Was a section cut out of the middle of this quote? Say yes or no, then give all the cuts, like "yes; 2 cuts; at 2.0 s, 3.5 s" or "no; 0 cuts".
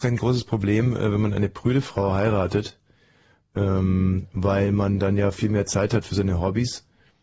no; 0 cuts